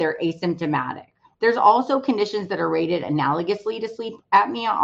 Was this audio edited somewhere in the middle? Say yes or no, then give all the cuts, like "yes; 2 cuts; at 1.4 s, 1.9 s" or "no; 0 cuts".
yes; 1 cut; at 1.3 s